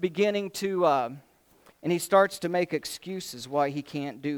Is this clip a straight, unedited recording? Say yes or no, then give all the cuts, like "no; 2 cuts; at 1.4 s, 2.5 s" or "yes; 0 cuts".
no; 1 cut; at 1.7 s